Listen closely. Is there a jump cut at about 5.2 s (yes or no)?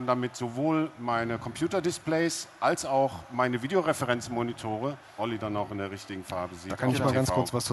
yes